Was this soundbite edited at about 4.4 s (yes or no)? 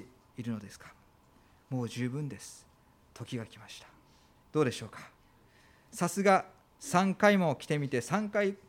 yes